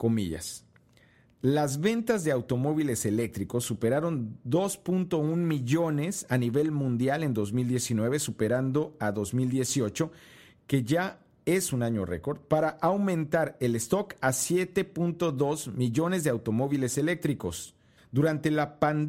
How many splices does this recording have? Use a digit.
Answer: 1